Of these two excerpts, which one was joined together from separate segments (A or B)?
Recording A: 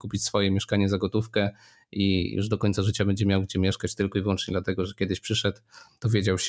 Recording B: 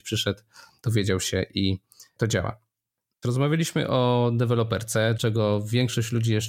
B